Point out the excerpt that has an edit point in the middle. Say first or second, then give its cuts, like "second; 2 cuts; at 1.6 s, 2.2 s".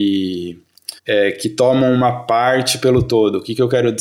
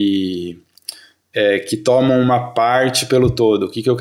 first; 1 cut; at 1.0 s